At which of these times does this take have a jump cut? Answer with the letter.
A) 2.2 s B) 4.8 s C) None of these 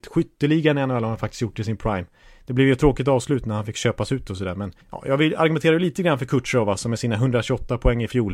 B